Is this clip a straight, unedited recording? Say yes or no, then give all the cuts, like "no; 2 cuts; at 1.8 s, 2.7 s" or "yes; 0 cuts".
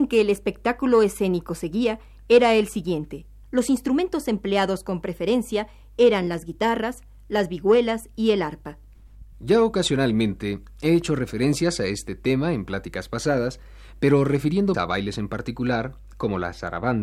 no; 3 cuts; at 3.4 s, 9.3 s, 14.7 s